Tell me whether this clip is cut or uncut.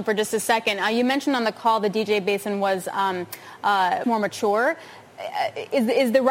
cut